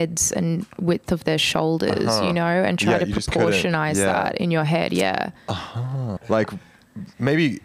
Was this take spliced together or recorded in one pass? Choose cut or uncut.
cut